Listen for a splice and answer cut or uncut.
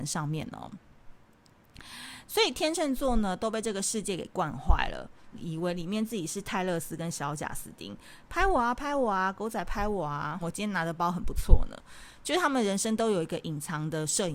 cut